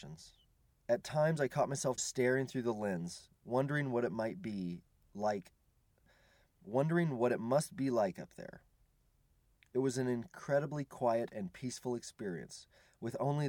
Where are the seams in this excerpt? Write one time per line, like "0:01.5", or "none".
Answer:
0:02.0

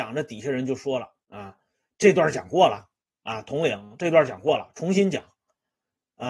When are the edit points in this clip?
0:01.2

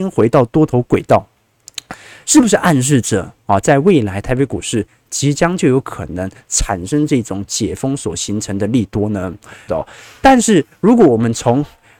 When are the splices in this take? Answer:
0:09.7

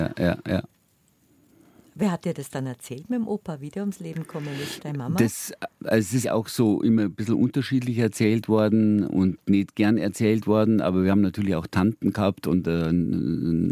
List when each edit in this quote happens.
0:06.2

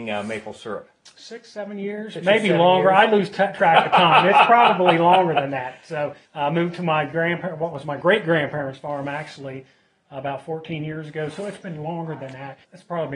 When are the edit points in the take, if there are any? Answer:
0:06.2

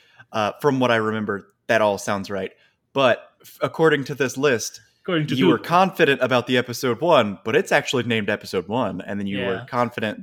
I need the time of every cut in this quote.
none

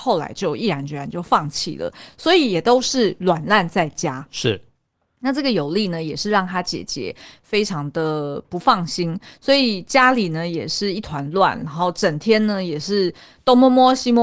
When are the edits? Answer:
none

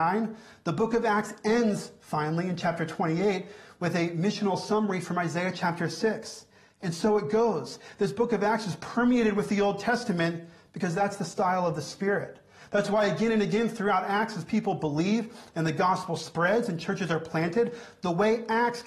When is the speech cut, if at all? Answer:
none

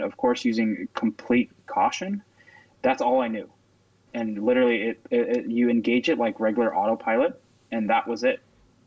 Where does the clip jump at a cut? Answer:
none

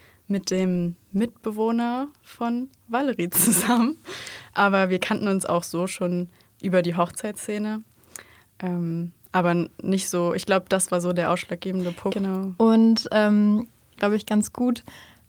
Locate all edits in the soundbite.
0:12.1
0:14.0

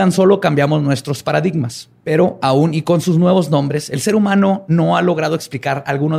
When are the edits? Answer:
0:02.0

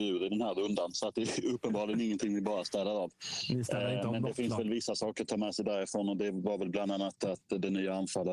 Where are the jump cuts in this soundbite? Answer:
none

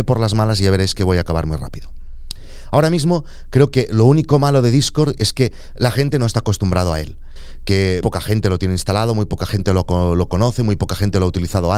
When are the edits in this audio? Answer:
0:08.0

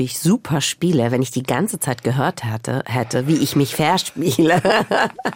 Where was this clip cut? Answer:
none

